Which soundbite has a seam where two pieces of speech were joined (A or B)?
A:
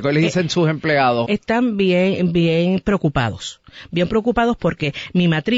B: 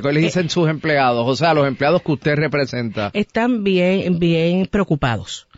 A